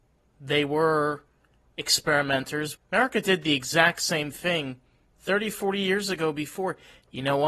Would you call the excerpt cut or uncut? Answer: cut